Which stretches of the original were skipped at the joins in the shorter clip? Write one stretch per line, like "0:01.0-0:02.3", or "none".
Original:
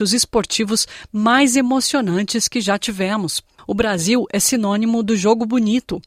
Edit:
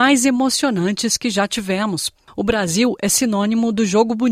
none